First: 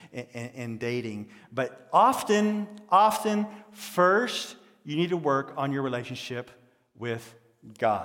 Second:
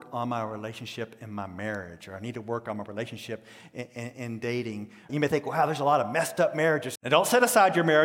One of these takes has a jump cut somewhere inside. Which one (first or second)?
second